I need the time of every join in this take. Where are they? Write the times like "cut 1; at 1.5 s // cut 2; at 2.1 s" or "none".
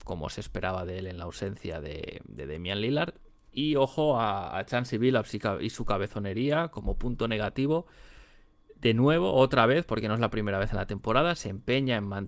none